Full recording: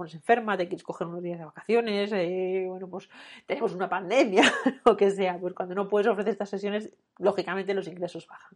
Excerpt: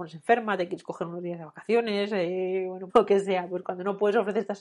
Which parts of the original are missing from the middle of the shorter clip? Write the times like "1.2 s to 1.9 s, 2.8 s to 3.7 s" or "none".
2.9 s to 4.8 s